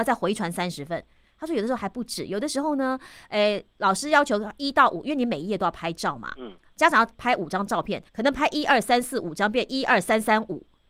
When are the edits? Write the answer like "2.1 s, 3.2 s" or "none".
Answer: 8.1 s